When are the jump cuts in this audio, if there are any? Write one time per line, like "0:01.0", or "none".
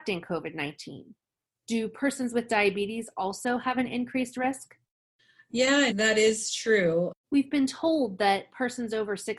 0:05.9
0:07.2